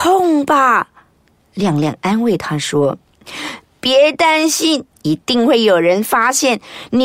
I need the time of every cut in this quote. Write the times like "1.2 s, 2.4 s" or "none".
4.9 s